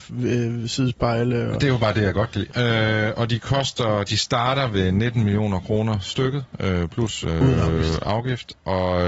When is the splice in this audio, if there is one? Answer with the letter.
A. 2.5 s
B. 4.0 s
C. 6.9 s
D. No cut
A